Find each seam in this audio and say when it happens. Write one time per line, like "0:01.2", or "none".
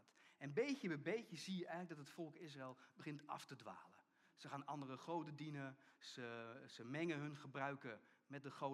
none